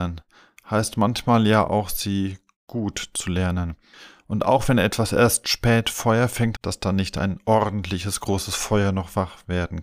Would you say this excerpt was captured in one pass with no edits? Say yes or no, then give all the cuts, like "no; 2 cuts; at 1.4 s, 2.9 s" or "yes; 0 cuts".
no; 1 cut; at 6.6 s